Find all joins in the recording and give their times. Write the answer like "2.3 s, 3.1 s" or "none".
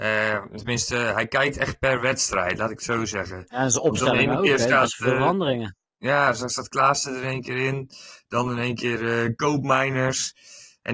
none